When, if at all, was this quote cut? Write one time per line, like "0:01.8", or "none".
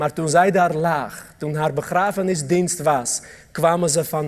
none